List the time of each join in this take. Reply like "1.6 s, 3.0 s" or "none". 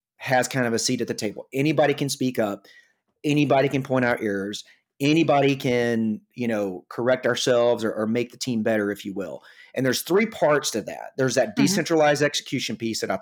none